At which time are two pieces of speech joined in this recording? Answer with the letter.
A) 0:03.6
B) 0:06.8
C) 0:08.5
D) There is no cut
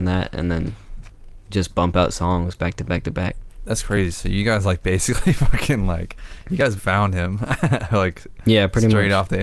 B